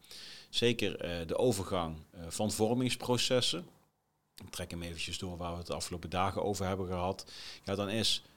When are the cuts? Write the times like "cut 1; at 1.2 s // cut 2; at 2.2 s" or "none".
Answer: none